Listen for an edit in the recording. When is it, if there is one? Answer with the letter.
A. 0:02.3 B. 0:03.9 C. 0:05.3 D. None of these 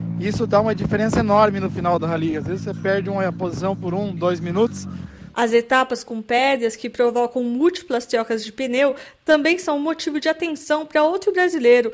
D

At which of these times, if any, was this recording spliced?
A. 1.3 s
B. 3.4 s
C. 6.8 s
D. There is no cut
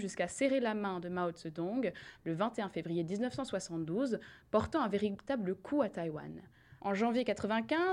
C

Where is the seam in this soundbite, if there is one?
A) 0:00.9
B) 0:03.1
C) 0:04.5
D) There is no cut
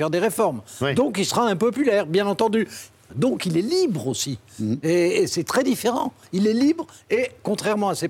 B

